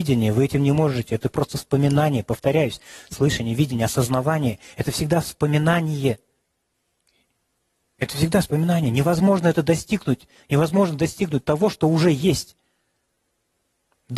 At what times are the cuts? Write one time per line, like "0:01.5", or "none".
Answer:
none